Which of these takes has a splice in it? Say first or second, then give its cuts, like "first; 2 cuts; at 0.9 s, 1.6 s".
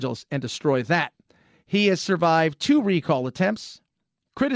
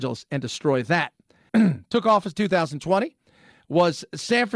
second; 1 cut; at 1.5 s